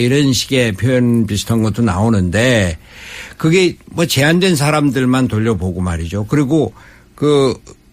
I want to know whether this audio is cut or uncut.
uncut